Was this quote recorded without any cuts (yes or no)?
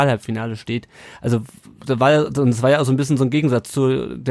yes